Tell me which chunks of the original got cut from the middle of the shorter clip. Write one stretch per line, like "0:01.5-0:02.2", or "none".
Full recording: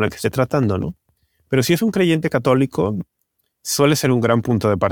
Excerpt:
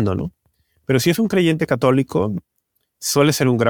none